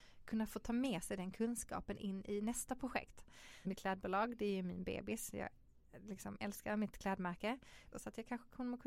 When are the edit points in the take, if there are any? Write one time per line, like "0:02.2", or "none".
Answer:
0:03.6
0:07.9